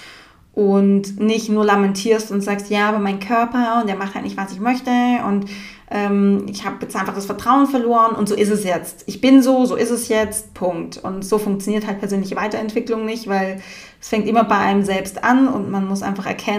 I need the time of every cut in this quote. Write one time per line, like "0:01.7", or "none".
none